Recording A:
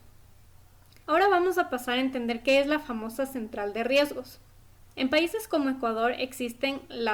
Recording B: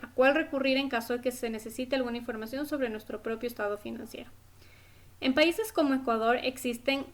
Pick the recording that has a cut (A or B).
A